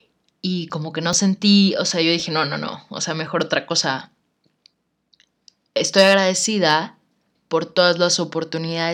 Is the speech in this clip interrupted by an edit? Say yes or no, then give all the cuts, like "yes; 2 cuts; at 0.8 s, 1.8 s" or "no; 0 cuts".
no; 0 cuts